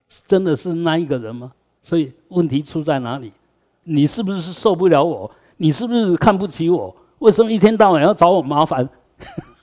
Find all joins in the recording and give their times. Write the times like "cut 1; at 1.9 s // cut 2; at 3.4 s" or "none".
cut 1; at 1.8 s // cut 2; at 3.8 s